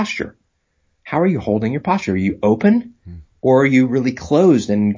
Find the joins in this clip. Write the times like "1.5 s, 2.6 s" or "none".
none